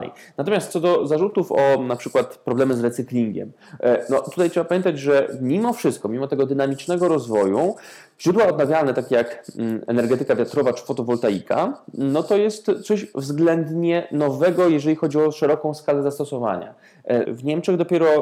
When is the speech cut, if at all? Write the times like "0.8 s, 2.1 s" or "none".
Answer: 17.3 s